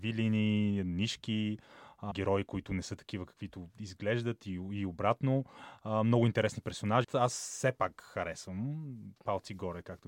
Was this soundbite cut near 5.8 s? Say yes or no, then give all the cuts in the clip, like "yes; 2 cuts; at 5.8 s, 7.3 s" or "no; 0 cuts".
no; 2 cuts; at 2.1 s, 7.0 s